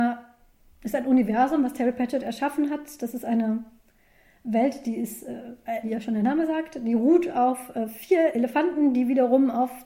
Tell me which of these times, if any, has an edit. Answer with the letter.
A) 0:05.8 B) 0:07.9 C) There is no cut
A